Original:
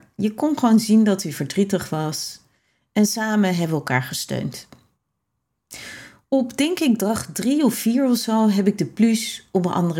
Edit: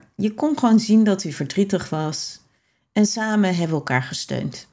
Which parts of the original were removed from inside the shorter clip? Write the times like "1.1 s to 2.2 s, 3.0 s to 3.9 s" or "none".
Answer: none